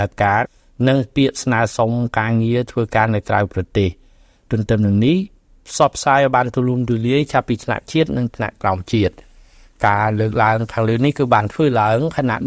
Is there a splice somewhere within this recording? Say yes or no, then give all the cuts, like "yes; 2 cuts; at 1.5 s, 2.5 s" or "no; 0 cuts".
no; 0 cuts